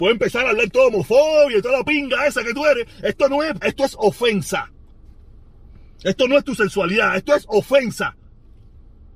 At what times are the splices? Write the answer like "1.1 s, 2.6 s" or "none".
3.6 s